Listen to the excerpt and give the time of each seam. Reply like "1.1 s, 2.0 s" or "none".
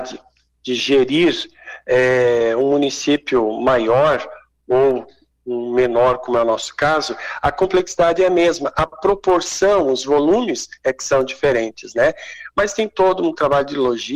none